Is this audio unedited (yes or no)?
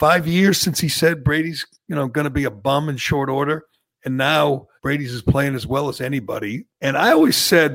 no